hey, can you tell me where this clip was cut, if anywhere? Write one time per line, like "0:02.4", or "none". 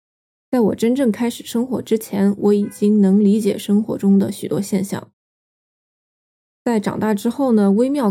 0:06.4